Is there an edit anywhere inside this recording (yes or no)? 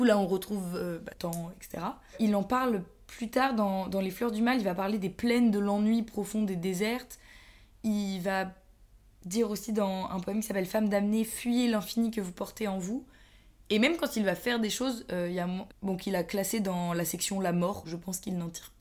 yes